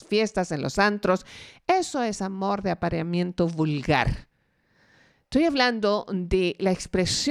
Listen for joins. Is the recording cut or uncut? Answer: uncut